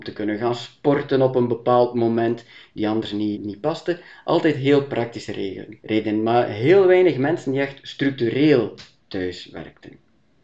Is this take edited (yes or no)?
yes